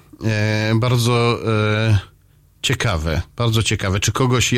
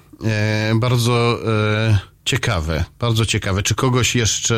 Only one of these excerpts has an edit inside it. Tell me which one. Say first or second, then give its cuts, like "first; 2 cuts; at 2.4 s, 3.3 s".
second; 1 cut; at 2.2 s